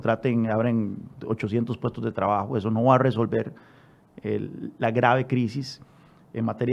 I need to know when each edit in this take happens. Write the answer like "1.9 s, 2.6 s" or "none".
none